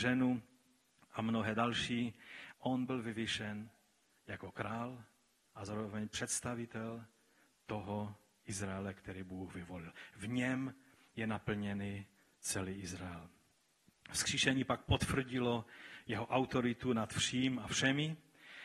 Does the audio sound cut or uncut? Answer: cut